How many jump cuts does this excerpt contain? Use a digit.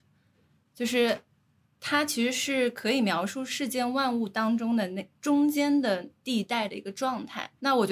0